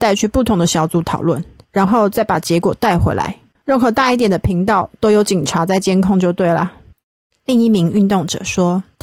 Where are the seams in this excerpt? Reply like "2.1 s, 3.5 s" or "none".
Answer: 3.6 s